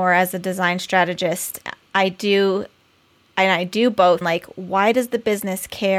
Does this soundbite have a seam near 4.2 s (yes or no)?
yes